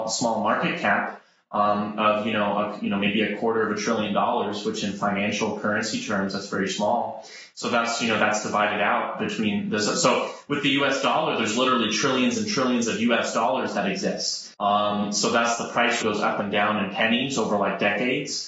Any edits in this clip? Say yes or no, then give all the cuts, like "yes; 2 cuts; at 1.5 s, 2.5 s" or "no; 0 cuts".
yes; 2 cuts; at 14.5 s, 16.0 s